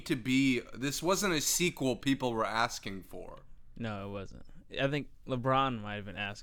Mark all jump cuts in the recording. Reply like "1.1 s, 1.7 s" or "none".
none